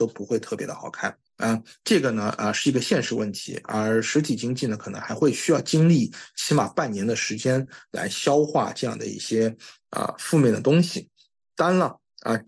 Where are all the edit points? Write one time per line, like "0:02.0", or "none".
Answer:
0:01.3